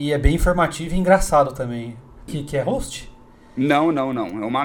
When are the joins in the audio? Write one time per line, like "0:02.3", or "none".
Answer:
0:02.3

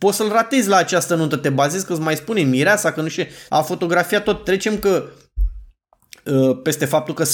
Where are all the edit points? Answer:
0:03.5

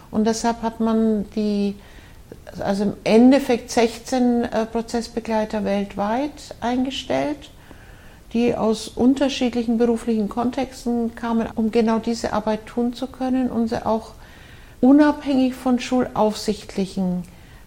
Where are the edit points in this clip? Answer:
0:11.5
0:14.7

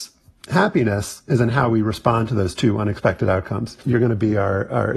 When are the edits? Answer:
0:03.8

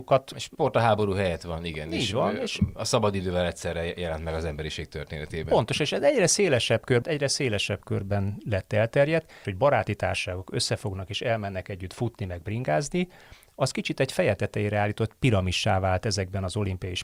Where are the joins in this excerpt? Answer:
0:07.0
0:09.4

